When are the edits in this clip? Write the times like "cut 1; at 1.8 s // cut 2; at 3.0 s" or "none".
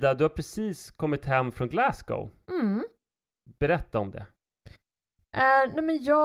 none